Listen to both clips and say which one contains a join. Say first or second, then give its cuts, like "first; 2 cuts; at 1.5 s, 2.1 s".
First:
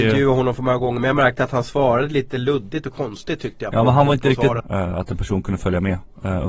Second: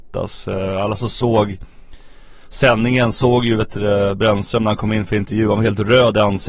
first; 1 cut; at 4.6 s